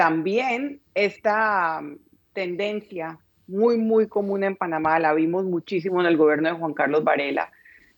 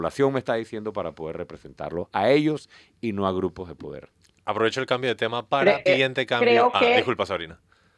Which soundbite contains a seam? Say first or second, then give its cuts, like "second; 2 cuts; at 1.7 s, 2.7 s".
second; 1 cut; at 5.9 s